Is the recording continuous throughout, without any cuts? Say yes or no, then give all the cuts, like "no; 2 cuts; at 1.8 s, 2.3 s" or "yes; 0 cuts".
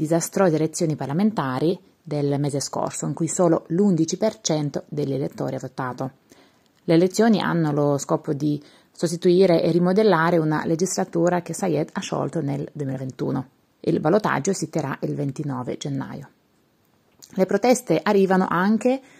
yes; 0 cuts